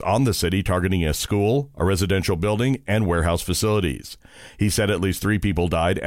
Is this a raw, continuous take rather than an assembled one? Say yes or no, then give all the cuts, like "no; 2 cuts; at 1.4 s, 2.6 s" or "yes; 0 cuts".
yes; 0 cuts